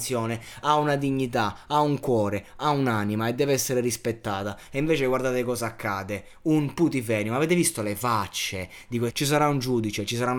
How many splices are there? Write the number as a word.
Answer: one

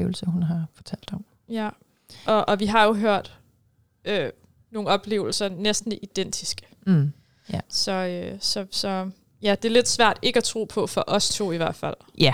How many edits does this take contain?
zero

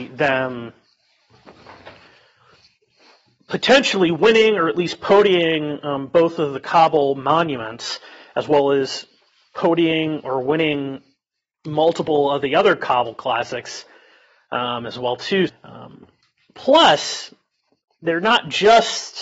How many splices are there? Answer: one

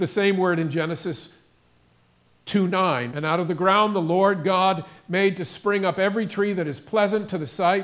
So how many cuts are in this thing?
one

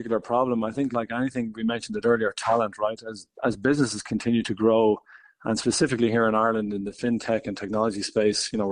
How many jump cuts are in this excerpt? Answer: zero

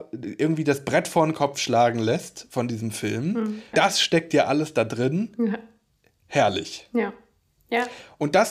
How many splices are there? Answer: one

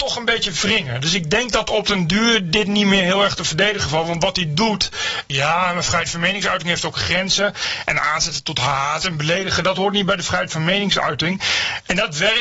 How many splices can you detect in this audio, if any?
one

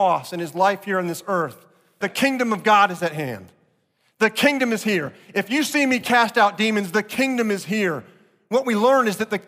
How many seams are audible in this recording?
one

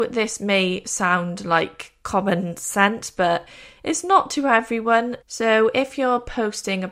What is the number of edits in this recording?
one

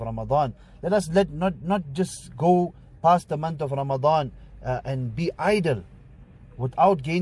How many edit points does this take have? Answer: zero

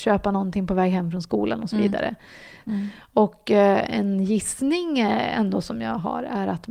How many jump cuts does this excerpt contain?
one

